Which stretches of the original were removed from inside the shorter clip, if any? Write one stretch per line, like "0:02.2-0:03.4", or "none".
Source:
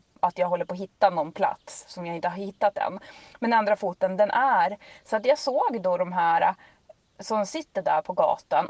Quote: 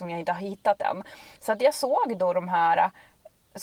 0:03.3-0:05.0